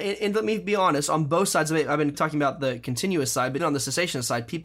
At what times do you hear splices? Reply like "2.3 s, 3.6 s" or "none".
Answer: 2.1 s, 3.6 s